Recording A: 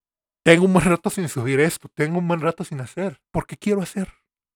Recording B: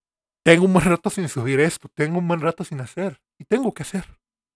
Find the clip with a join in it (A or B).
A